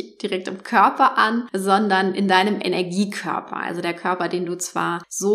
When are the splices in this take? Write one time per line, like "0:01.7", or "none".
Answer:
none